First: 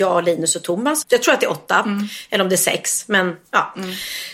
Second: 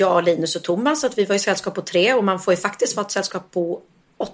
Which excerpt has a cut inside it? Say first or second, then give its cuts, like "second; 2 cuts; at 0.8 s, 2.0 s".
first; 1 cut; at 1.0 s